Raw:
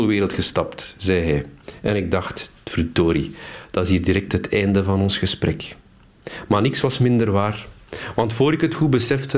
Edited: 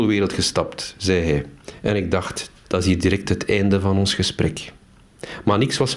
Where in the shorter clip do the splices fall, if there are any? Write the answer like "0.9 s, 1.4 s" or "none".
2.6 s